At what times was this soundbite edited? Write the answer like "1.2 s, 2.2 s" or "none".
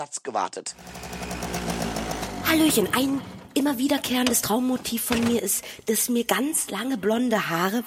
none